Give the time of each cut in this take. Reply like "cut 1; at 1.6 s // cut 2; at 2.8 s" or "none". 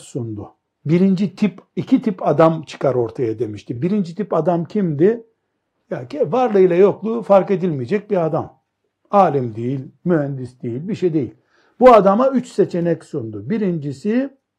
none